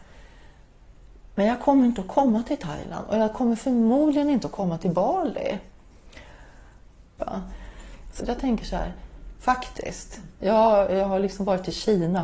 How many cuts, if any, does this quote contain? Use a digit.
3